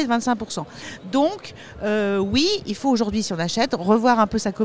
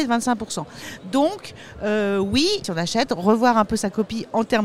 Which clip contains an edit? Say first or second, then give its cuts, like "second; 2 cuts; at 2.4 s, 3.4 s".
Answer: second; 1 cut; at 2.6 s